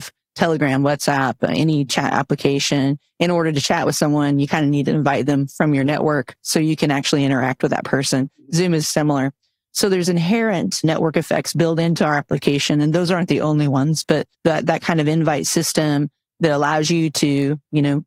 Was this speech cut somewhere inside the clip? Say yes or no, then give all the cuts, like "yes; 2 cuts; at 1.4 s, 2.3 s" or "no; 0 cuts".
yes; 2 cuts; at 8.8 s, 14.3 s